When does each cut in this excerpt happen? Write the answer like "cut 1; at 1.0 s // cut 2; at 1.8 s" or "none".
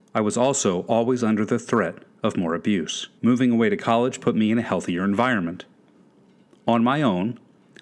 cut 1; at 3.2 s